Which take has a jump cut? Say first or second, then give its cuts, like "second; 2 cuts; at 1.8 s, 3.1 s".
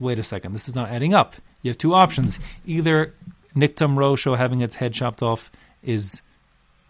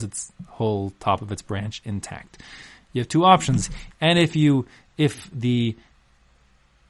second; 2 cuts; at 2.8 s, 3.9 s